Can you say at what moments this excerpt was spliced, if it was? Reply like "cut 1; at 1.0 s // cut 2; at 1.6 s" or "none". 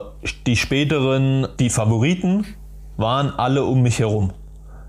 cut 1; at 1.6 s